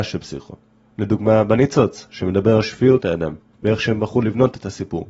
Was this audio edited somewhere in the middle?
yes; 1 cut; at 3.5 s

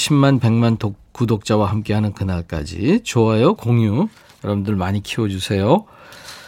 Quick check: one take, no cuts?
no; 1 cut; at 3.6 s

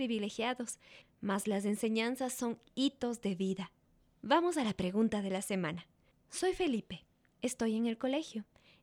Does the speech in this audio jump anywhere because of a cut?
yes; 1 cut; at 1.0 s

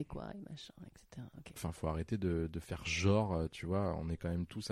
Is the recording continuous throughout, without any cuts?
no; 1 cut; at 1.6 s

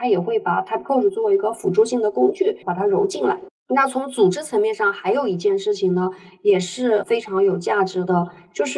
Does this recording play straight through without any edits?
yes; 0 cuts

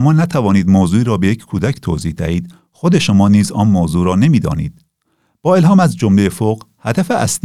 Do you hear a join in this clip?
no; 0 cuts

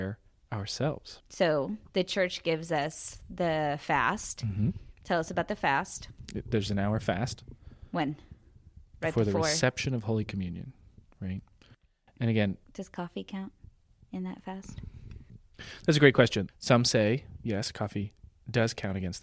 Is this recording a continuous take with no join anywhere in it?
no; 2 cuts; at 12.6 s, 16.5 s

